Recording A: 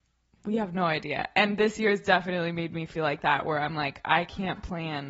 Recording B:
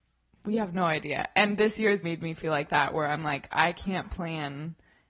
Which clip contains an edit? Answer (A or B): B